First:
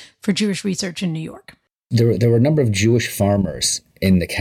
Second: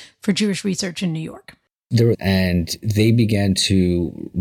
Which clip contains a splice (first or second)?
second